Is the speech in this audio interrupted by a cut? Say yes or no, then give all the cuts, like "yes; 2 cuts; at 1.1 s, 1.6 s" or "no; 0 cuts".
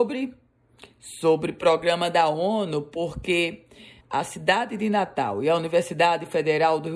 yes; 1 cut; at 4.0 s